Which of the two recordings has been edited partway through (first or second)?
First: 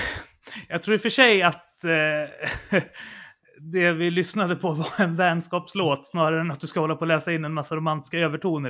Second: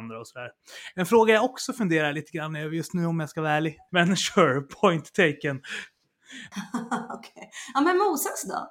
second